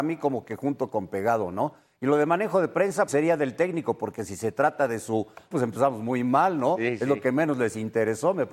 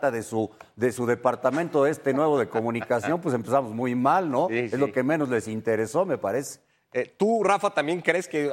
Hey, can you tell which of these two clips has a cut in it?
first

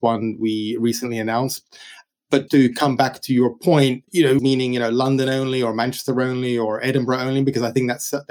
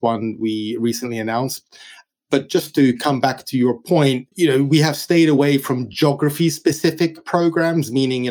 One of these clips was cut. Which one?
first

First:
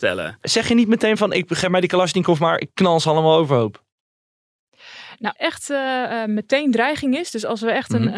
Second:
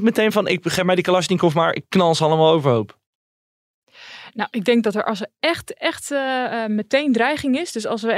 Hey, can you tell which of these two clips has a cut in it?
first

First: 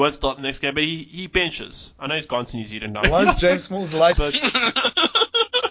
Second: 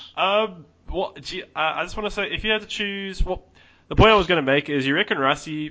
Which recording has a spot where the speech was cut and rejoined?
first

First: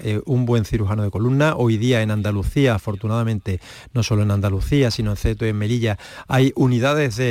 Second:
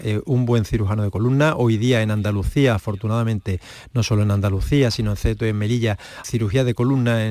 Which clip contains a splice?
second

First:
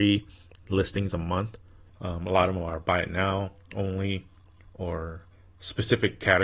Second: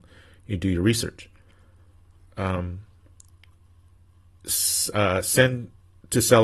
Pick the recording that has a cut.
first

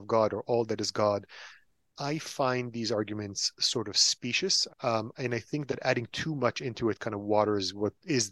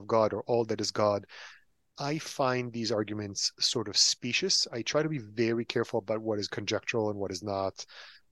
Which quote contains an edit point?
first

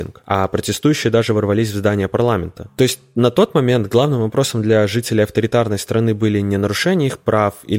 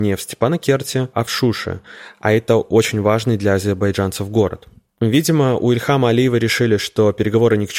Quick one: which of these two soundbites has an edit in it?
second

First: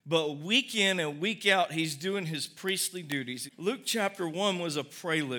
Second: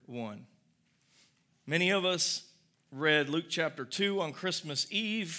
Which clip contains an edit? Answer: first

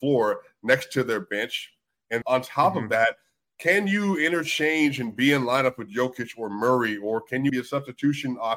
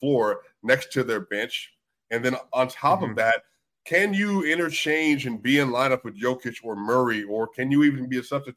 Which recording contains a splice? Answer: first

